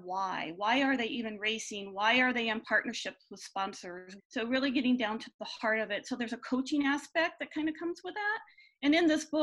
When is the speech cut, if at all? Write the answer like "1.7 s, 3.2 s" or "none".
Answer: 4.2 s